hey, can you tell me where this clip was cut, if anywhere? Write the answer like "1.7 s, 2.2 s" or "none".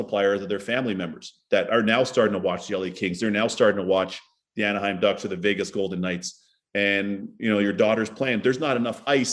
none